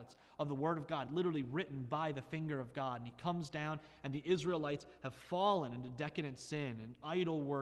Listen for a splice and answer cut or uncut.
uncut